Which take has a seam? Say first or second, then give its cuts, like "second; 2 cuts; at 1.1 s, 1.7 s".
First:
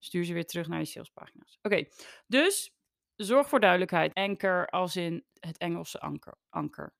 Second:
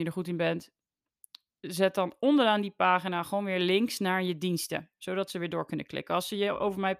first; 2 cuts; at 4.1 s, 5.3 s